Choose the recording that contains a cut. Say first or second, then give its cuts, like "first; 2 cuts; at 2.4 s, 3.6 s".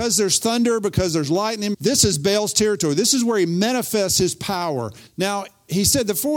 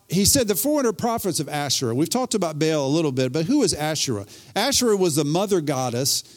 first; 2 cuts; at 1.7 s, 5.1 s